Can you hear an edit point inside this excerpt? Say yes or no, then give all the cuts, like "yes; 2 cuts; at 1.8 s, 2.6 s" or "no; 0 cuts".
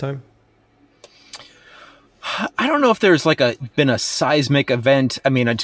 no; 0 cuts